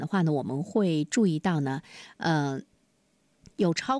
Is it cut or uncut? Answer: uncut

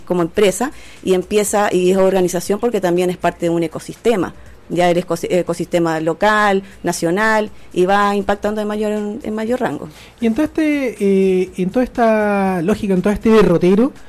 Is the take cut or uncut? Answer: uncut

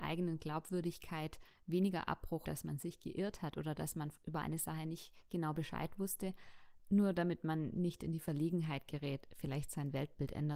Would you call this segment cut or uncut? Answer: cut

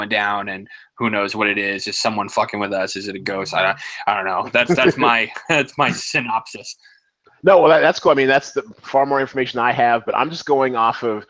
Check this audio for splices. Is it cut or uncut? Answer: uncut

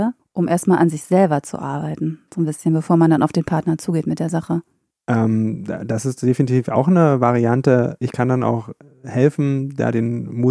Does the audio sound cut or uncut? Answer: uncut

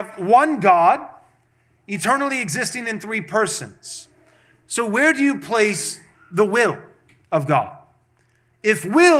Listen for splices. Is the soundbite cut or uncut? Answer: uncut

